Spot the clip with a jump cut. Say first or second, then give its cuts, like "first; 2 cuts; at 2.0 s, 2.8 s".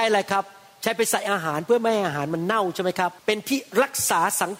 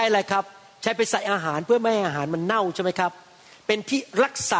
first; 1 cut; at 3.2 s